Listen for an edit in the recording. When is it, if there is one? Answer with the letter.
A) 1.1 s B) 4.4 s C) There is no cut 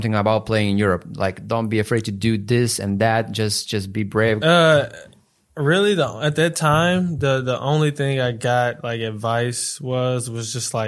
B